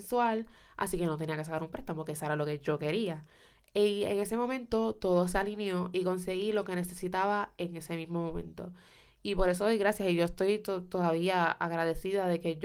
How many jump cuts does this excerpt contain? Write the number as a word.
zero